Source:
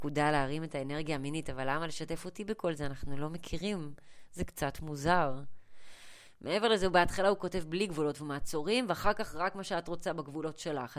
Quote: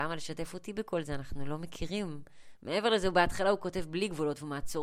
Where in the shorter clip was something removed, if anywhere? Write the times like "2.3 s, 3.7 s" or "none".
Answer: 2.6 s